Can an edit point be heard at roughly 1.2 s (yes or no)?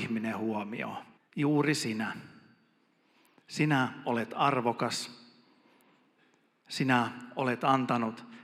yes